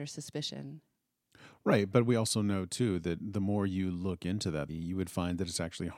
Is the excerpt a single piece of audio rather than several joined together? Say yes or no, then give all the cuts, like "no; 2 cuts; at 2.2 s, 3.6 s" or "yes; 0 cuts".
no; 1 cut; at 4.7 s